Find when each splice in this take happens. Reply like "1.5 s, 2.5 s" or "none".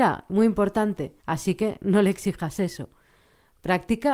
1.2 s